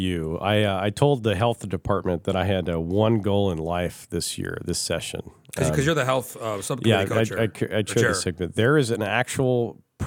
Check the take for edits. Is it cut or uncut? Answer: uncut